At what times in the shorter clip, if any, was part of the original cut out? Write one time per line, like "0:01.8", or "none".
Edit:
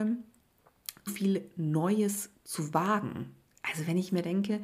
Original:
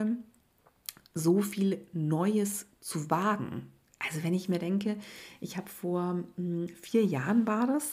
0:01.1

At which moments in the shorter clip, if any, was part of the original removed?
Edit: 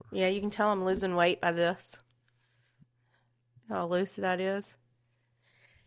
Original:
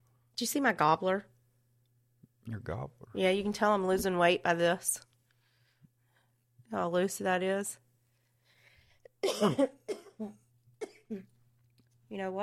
none

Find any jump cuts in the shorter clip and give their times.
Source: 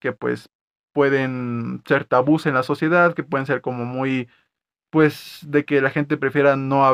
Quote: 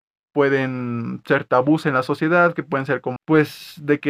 0:03.2

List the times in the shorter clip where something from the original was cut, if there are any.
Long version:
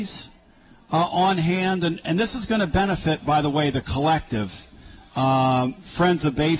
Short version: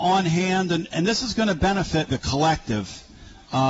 0:02.1

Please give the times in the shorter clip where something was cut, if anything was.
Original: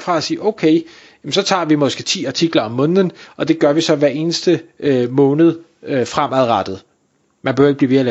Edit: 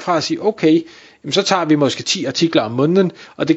none

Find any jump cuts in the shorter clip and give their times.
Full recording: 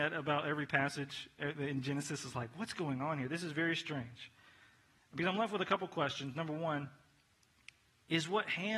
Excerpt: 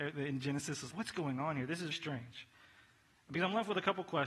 0:00.9
0:01.9

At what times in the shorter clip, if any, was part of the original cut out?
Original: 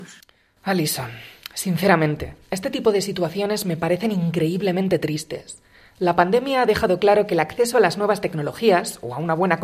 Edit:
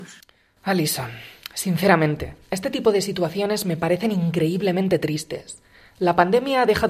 none

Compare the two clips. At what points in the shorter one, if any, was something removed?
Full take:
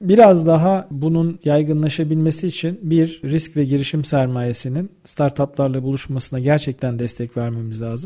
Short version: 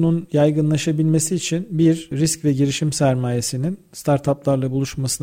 none

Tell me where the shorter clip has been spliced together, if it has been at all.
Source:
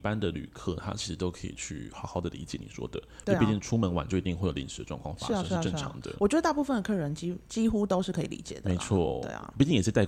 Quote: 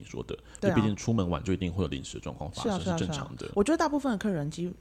none

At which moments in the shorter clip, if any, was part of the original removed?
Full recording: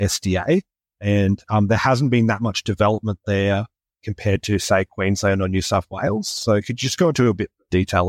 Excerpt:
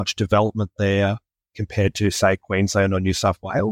none

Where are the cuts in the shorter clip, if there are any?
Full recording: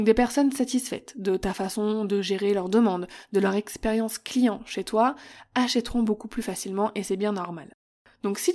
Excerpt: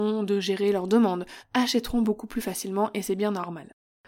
0:01.4

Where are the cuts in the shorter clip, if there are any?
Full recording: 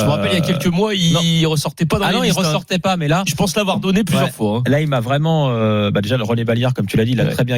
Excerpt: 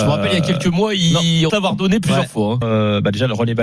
0:01.5
0:02.6

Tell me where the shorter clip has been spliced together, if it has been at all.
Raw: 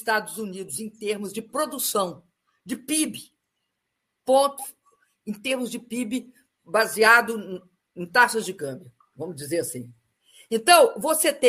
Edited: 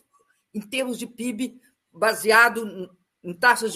none

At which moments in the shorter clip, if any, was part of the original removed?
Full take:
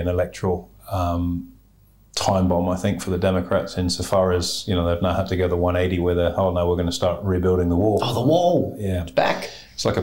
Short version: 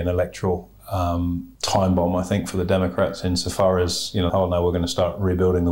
0:01.6
0:04.3

